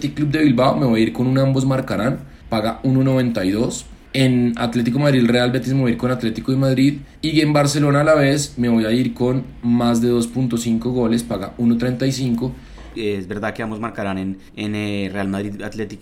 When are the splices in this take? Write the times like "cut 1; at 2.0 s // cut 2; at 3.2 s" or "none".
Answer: cut 1; at 7.1 s // cut 2; at 12.9 s // cut 3; at 14.5 s